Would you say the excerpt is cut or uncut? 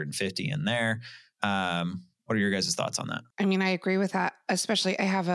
cut